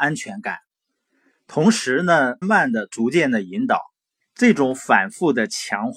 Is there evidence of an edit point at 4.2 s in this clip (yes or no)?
yes